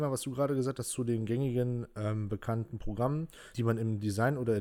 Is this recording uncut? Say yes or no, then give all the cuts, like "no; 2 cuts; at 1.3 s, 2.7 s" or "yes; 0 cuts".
yes; 0 cuts